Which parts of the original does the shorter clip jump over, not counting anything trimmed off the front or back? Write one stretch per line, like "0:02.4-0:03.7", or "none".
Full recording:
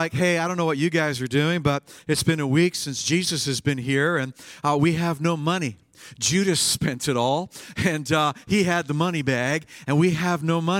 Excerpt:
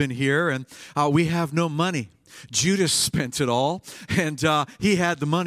none